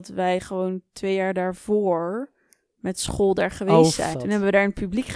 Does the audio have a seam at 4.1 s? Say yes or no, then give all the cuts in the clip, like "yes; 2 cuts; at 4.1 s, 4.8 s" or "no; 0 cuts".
yes; 1 cut; at 4.1 s